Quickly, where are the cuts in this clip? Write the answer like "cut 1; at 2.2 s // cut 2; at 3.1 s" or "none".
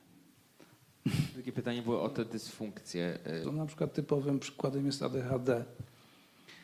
cut 1; at 3.4 s

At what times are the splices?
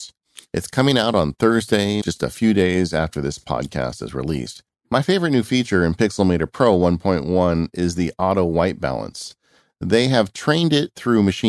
cut 1; at 2.0 s // cut 2; at 4.8 s

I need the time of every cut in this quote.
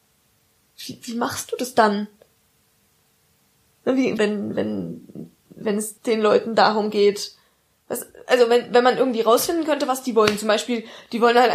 cut 1; at 4.2 s // cut 2; at 6.0 s

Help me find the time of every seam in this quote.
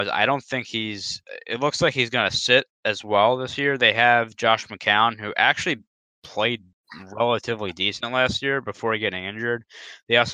none

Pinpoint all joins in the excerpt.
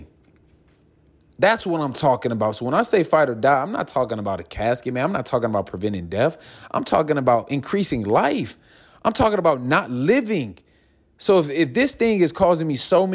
none

